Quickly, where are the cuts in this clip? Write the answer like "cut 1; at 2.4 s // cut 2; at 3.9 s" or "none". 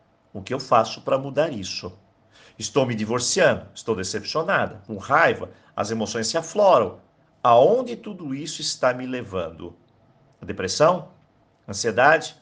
none